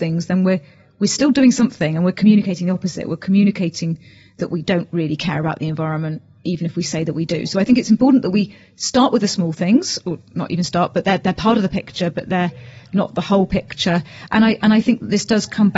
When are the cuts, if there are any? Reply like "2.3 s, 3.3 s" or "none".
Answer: none